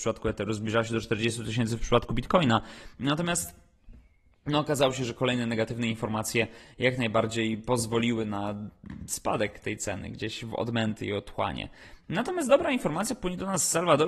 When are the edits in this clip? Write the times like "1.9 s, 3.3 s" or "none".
12.0 s